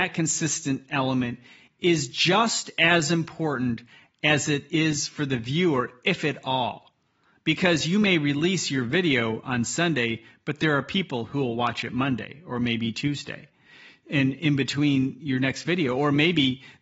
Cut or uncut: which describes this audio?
uncut